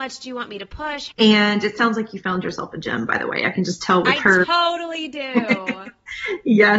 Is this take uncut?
no; 1 cut; at 1.1 s

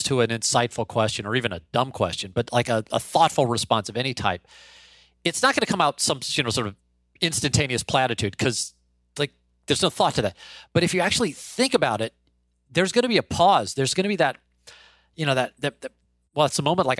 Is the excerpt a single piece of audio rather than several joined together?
yes; 0 cuts

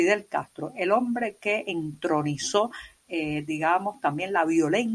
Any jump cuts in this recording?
no; 0 cuts

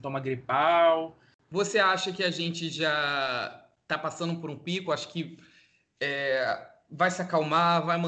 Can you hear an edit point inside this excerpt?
no; 0 cuts

